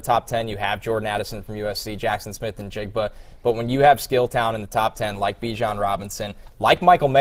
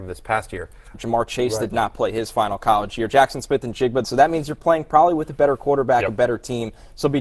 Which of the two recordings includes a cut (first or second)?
second